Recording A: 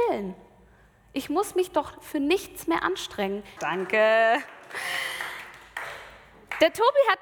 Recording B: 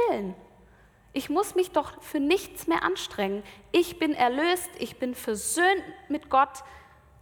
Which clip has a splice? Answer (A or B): A